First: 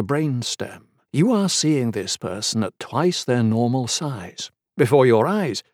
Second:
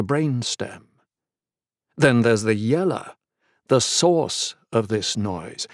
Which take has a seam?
first; 2 cuts; at 1.1 s, 4.7 s

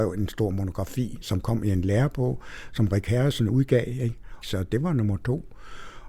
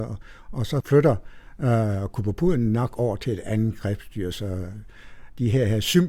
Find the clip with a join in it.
first; 1 cut; at 4.4 s

